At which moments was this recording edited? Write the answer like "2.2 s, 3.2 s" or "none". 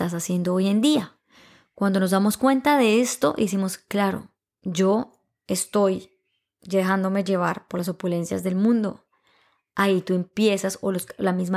none